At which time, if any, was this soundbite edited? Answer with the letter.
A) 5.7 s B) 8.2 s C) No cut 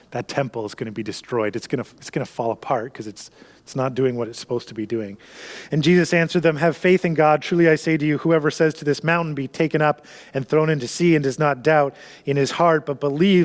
C